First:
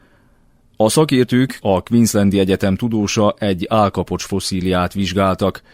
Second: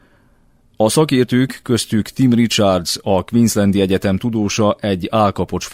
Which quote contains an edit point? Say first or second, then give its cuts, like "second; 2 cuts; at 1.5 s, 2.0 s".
first; 1 cut; at 1.6 s